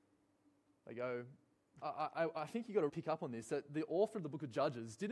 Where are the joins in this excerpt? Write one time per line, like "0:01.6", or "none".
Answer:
0:01.8
0:02.9